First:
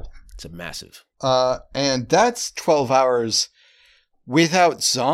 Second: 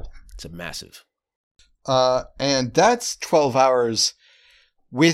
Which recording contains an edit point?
first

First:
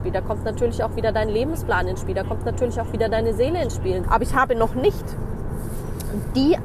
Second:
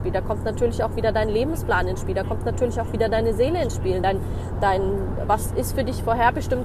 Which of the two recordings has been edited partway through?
first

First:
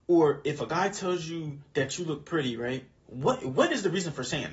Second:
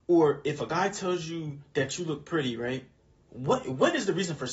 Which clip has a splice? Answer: first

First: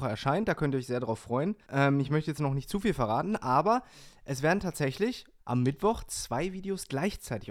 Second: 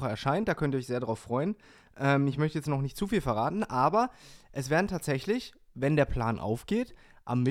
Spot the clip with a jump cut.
first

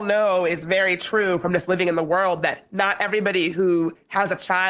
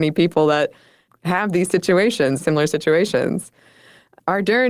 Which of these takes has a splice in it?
second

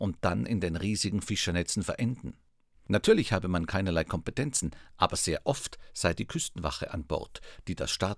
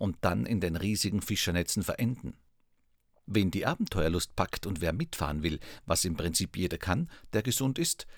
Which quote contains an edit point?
first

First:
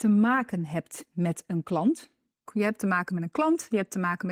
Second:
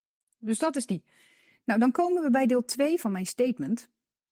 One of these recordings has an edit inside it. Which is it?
first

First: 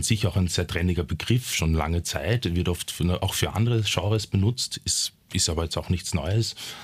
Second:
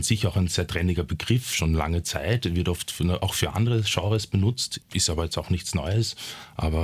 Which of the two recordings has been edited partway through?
second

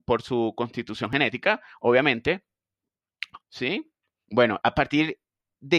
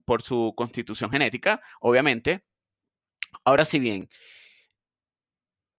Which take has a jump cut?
first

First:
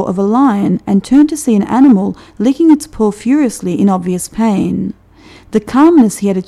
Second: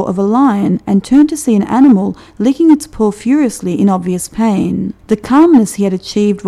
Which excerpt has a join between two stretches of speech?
second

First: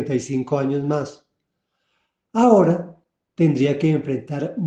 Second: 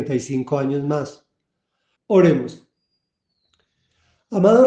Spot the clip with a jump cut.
second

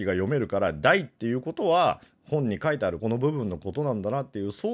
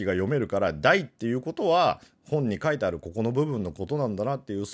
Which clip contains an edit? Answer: first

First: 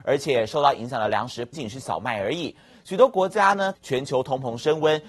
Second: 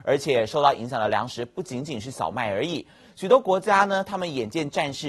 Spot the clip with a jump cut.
first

